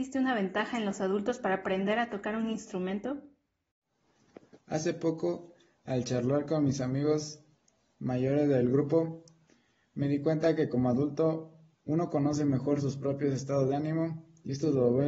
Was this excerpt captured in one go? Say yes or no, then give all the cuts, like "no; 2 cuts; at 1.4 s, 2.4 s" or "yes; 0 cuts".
no; 1 cut; at 4.6 s